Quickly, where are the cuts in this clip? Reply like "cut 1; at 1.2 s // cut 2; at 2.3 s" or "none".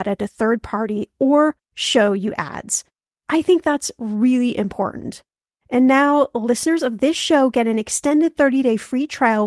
cut 1; at 5.6 s